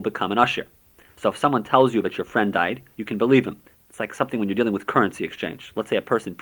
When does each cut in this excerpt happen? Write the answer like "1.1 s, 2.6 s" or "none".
3.7 s